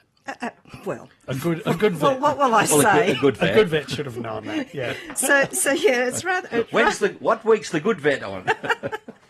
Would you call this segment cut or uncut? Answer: uncut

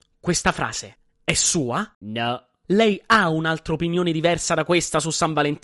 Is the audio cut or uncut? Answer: cut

